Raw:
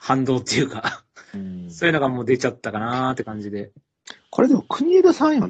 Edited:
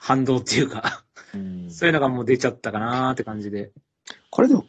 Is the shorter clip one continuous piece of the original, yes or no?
yes